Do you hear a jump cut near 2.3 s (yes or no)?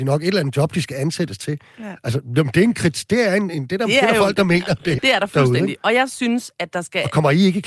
no